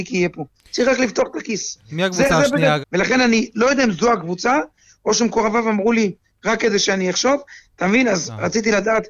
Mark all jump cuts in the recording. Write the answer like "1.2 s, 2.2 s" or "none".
2.8 s, 7.6 s